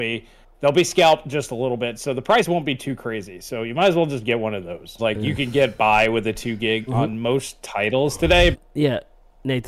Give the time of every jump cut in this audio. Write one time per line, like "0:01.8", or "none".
0:05.0
0:06.9
0:08.5